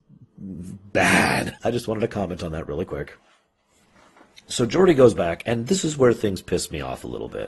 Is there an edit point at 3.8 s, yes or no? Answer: no